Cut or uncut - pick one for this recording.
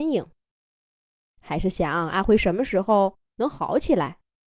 cut